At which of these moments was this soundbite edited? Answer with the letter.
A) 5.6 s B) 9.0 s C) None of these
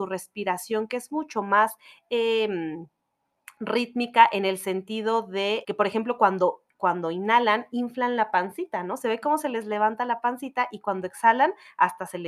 A